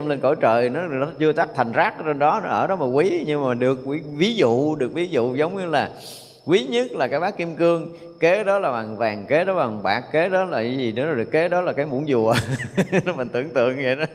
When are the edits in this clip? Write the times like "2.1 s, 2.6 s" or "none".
none